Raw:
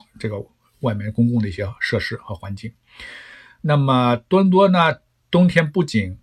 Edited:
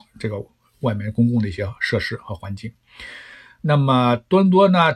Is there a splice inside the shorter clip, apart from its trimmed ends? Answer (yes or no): no